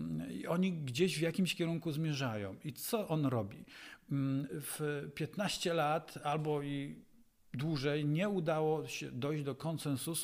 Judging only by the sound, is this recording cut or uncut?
cut